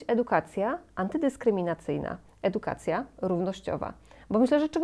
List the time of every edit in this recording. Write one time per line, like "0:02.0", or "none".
none